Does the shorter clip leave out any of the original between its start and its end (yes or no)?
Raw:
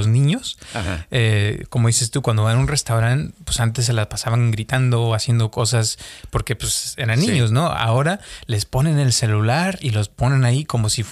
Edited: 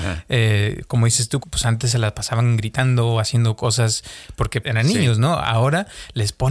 yes